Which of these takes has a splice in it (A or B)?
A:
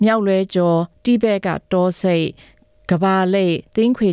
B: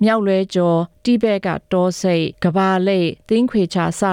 B